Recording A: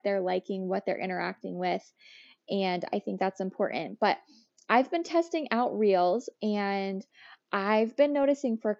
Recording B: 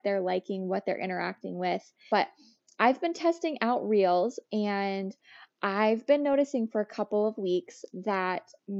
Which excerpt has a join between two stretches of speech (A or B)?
B